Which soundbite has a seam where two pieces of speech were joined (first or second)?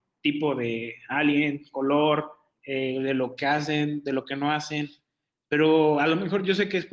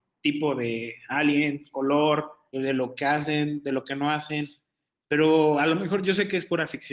second